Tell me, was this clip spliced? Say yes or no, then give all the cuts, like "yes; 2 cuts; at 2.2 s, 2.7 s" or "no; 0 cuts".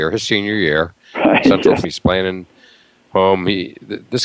yes; 1 cut; at 1.8 s